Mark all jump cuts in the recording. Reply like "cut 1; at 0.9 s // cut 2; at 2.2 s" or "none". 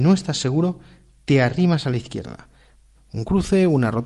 cut 1; at 2.9 s